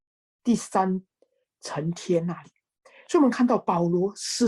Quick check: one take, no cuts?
yes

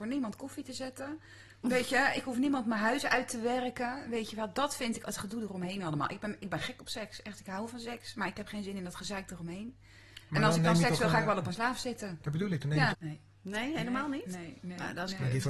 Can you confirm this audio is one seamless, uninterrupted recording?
no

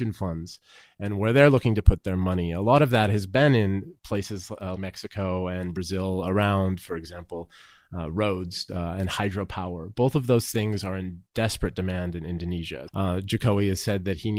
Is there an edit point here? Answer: yes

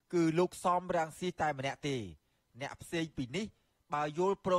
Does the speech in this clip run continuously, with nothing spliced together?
yes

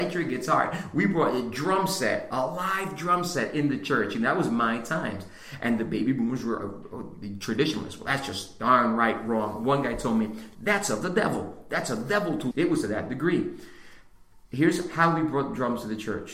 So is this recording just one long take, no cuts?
no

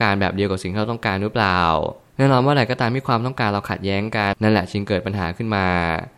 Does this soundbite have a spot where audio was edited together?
yes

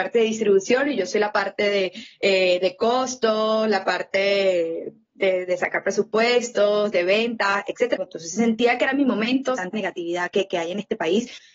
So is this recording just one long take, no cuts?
no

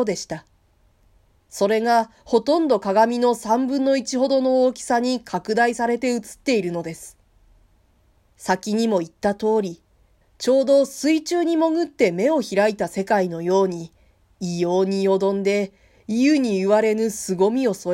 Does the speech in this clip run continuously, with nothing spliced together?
no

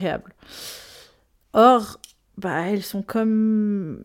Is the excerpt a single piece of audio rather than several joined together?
yes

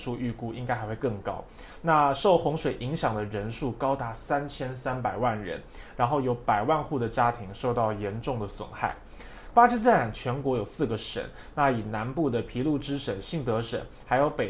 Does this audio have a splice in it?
no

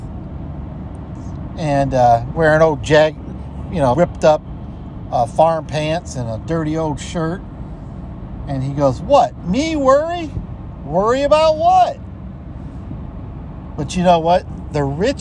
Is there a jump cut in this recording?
yes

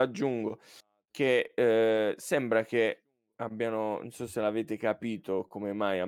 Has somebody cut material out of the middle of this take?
no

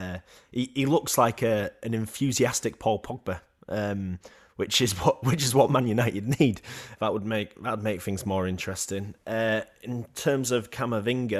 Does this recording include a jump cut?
yes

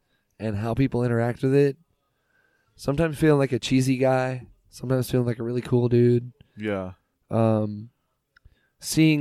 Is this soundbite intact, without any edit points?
yes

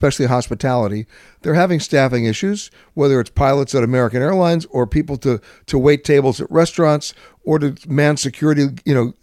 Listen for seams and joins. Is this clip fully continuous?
yes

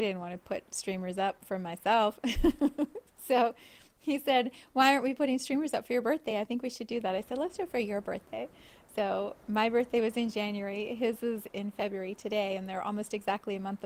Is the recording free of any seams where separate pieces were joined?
yes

